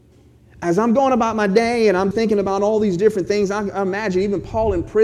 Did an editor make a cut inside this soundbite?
yes; 1 cut; at 2.1 s

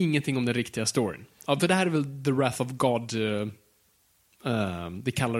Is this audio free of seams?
yes; 0 cuts

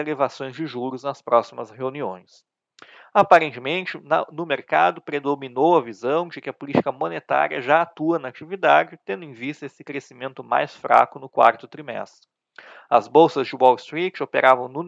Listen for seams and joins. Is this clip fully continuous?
yes; 0 cuts

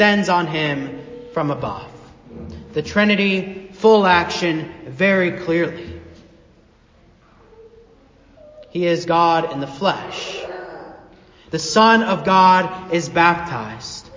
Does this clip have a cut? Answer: yes; 1 cut; at 11.5 s

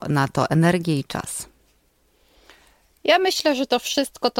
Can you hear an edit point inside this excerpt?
no; 0 cuts

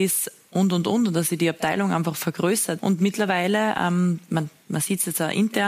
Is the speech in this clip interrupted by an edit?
yes; 1 cut; at 2.8 s

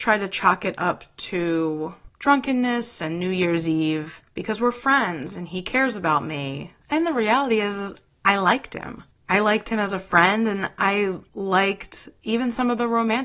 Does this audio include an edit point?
yes; 1 cut; at 6.8 s

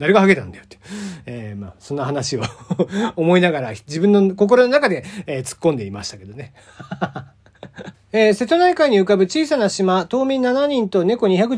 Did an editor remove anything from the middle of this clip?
yes; 1 cut; at 7.9 s

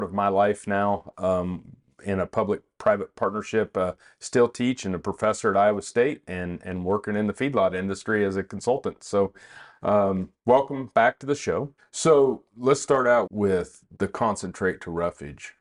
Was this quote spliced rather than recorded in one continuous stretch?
yes; 2 cuts; at 11.8 s, 13.3 s

